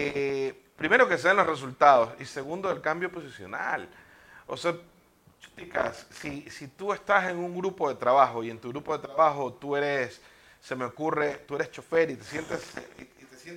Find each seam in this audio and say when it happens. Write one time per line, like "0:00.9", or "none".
none